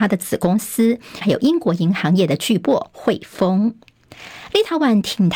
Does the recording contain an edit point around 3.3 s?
no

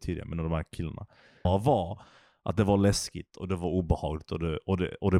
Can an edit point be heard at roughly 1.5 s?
yes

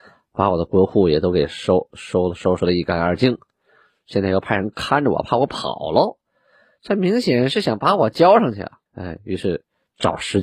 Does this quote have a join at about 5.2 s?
no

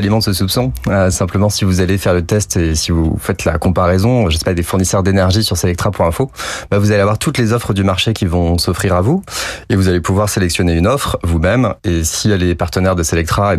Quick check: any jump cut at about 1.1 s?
no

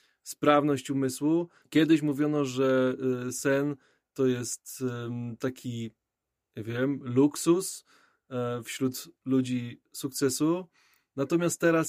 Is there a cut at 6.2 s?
no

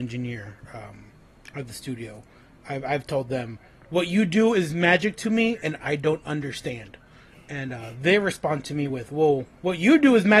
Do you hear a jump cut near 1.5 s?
no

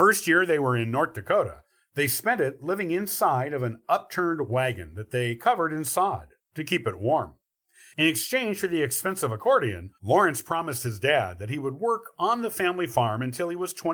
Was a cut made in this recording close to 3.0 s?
no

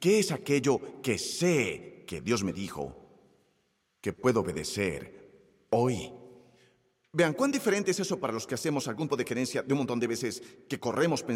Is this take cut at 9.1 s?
yes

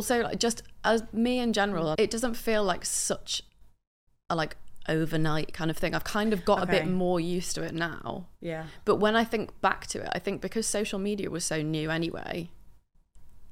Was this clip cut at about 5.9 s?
no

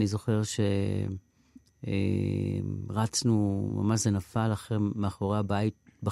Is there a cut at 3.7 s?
no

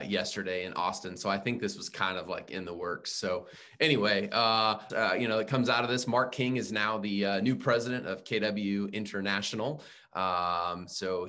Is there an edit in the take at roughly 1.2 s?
no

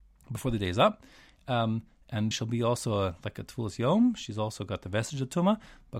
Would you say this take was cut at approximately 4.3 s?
no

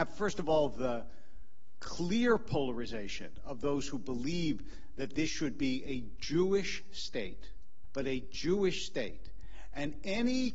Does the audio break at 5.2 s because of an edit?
no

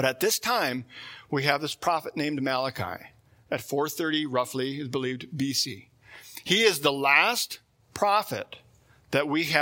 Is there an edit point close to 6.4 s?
no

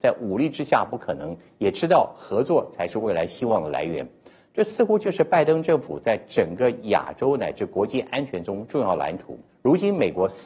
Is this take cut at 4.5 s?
no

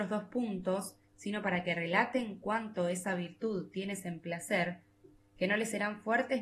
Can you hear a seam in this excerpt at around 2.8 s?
no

